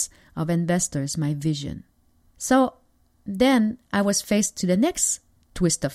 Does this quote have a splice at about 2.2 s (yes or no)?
yes